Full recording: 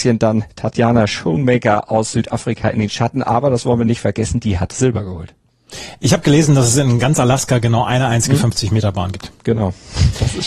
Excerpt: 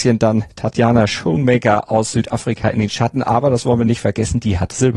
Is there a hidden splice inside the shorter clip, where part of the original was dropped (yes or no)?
no